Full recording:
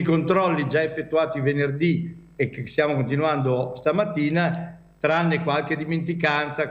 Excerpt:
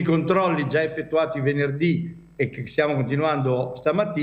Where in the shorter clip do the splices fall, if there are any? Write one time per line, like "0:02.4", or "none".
none